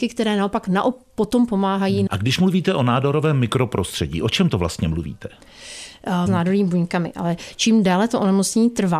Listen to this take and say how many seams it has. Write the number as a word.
two